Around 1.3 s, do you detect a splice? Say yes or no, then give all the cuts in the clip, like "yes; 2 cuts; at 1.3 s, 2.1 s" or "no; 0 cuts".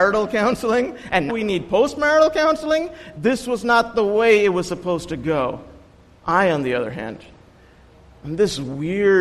yes; 1 cut; at 1.3 s